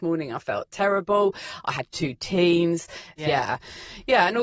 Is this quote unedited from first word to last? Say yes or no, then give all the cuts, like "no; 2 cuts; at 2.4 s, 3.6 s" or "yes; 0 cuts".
no; 1 cut; at 3.2 s